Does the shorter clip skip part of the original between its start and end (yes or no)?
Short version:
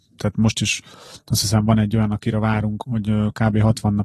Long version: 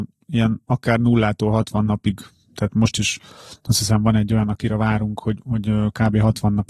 yes